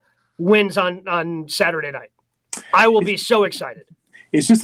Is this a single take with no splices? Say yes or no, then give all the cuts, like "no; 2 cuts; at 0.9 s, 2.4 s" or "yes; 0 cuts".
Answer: yes; 0 cuts